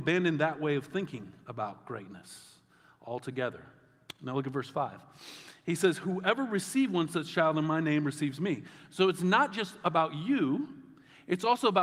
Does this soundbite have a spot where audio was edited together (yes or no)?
no